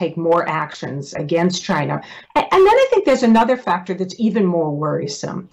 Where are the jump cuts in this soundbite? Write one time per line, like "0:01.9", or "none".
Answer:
0:01.1
0:02.3